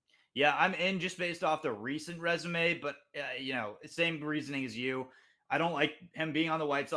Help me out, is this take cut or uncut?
uncut